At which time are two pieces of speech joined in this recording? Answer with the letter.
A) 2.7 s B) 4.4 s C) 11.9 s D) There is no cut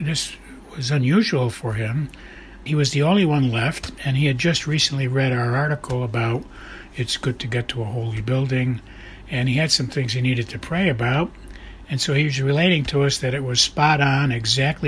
A